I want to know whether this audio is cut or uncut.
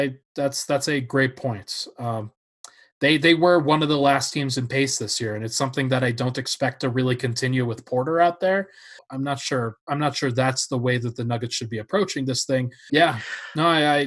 cut